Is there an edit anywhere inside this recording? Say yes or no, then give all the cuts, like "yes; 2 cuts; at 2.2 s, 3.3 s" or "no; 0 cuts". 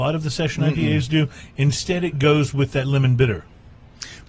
no; 0 cuts